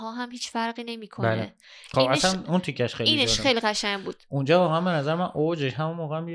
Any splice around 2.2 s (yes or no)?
no